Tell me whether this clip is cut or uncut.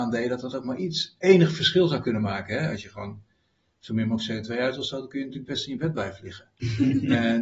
uncut